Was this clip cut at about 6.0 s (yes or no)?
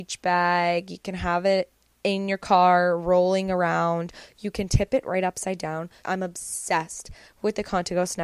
yes